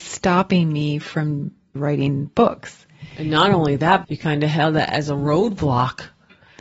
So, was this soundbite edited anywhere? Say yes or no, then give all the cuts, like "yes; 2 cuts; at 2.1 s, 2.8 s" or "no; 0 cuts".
yes; 2 cuts; at 1.8 s, 4.0 s